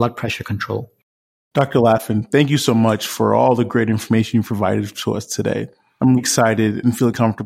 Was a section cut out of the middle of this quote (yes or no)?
yes